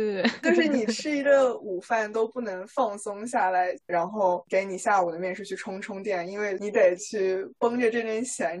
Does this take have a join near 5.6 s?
no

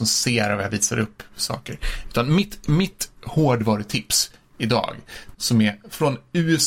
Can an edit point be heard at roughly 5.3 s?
yes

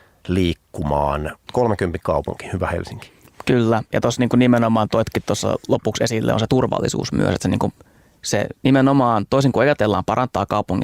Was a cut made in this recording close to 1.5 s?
yes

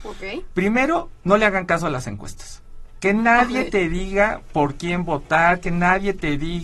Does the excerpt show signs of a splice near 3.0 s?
no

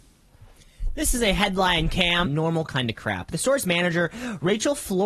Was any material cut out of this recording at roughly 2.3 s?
yes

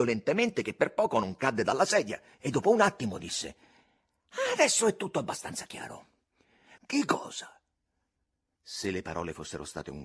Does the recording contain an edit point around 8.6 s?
no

